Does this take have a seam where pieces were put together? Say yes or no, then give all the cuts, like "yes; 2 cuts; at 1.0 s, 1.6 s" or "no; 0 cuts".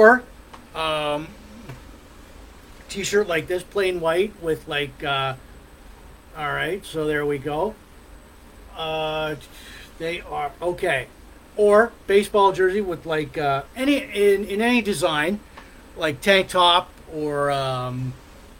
no; 0 cuts